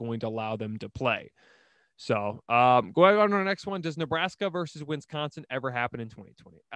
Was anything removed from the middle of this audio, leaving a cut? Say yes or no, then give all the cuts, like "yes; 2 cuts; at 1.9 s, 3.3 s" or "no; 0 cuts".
no; 0 cuts